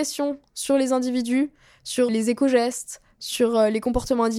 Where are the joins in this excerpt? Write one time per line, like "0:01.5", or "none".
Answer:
0:02.1